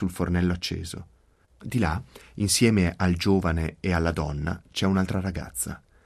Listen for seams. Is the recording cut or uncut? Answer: cut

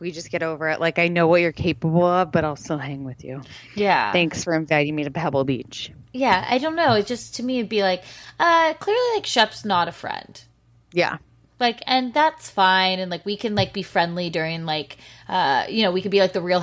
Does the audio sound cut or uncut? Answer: uncut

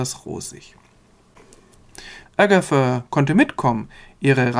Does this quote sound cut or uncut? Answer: cut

